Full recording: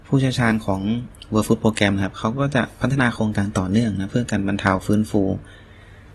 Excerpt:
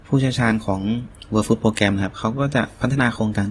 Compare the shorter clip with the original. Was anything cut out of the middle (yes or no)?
no